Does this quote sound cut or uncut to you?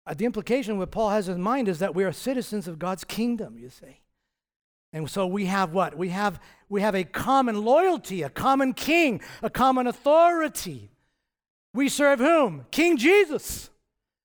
cut